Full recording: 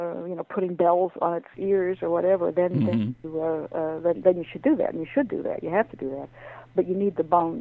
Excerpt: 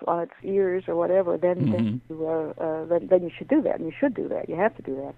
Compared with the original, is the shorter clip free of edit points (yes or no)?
yes